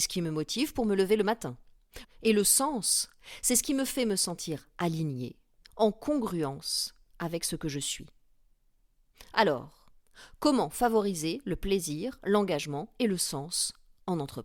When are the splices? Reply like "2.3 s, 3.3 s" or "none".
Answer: 2.0 s

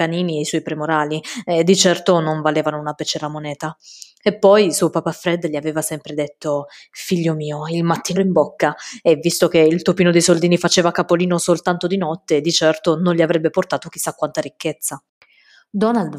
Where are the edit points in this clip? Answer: 8.2 s

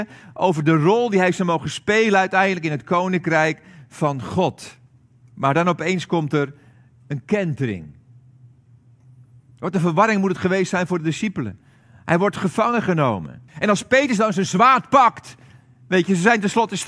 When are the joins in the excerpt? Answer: 13.5 s

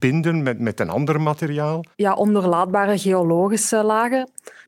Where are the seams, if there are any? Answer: 1.9 s

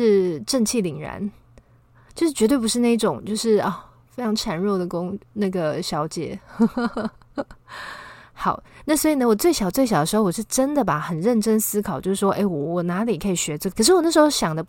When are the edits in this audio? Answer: 13.7 s

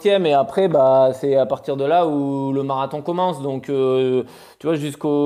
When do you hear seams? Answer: none

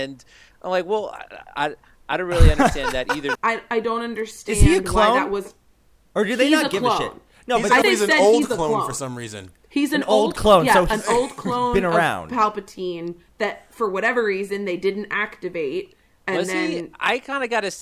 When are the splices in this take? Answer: 3.3 s, 7.8 s

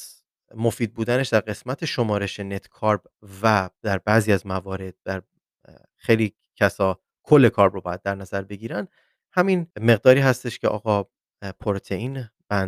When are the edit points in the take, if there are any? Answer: 9.7 s

